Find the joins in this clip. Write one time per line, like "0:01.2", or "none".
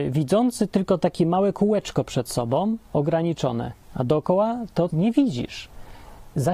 0:03.8
0:04.9